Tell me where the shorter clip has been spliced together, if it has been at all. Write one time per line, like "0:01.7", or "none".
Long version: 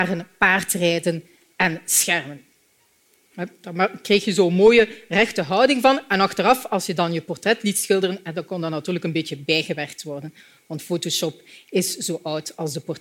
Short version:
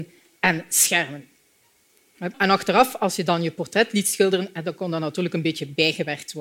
0:02.3